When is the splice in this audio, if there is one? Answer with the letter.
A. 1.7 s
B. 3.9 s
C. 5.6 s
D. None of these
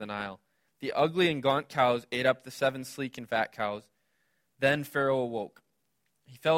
D